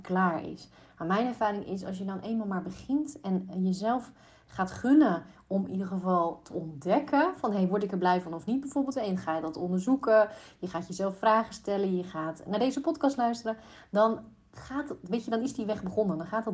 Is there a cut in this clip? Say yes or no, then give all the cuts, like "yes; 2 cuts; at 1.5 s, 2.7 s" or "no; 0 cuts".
no; 0 cuts